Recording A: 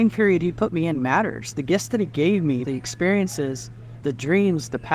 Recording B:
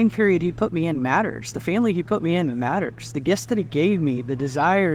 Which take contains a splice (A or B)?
A